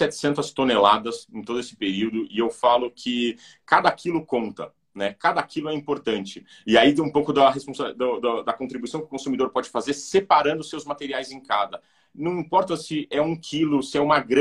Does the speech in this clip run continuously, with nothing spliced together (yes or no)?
yes